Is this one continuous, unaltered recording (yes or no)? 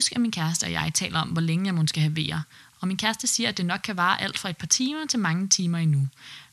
yes